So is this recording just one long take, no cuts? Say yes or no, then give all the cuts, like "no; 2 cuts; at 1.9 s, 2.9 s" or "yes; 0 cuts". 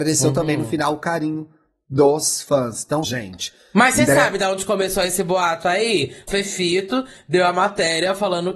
no; 2 cuts; at 3.0 s, 6.3 s